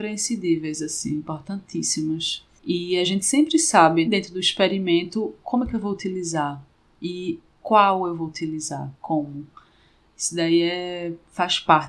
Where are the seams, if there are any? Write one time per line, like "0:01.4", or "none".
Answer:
0:02.6
0:04.1
0:05.4